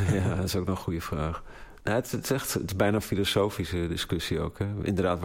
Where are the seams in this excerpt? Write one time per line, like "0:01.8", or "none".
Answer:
0:01.8